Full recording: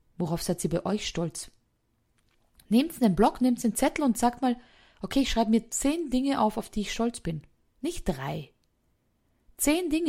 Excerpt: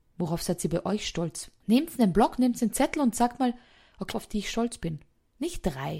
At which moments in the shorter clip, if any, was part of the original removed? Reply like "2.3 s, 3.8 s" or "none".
1.6 s, 4.1 s